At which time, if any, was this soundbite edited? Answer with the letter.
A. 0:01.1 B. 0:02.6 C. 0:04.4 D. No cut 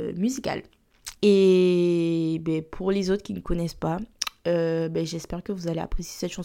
A